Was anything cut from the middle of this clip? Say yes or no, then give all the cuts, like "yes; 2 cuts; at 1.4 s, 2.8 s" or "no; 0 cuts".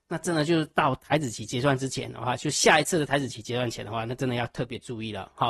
no; 0 cuts